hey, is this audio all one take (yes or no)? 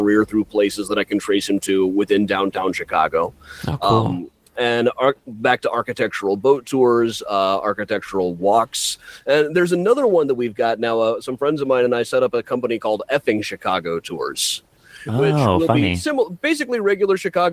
yes